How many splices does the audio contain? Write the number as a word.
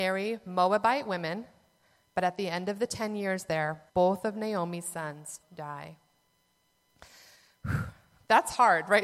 two